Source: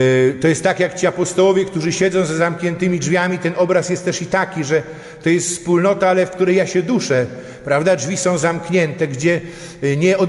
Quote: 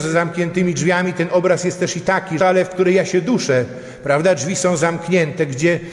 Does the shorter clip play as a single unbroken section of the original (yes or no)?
no